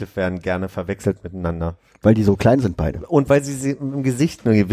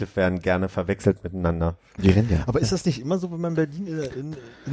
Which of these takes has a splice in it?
second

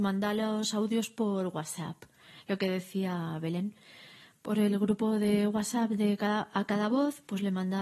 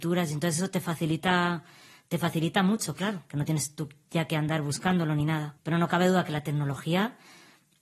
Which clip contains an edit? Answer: second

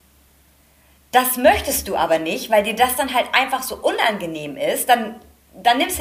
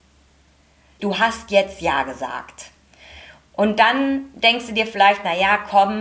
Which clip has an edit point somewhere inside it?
second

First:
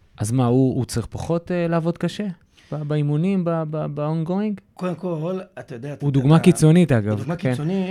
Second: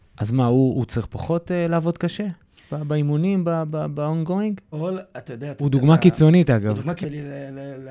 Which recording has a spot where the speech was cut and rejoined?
second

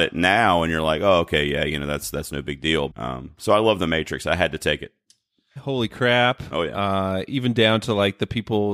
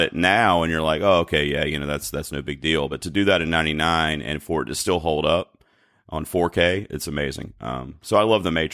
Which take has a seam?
first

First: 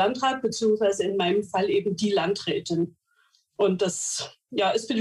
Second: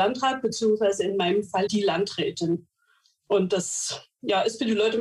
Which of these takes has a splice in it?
second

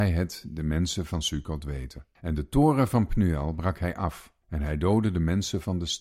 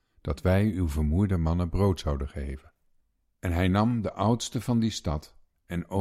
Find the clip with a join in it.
first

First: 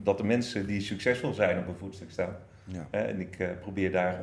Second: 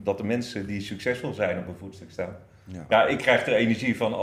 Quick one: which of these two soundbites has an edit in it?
second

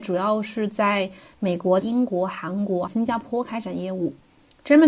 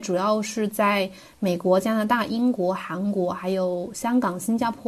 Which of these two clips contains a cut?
first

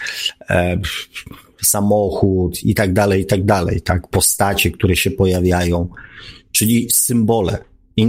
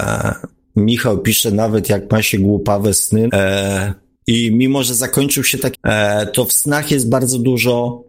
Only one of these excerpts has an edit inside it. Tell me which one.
second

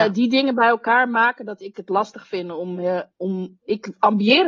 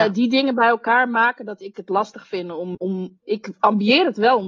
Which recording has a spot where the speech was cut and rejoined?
second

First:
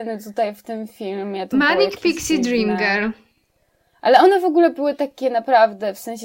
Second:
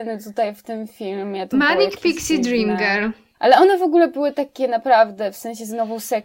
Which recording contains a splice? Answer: second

